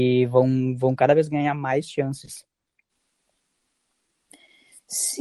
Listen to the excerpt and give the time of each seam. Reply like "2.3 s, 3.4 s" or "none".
none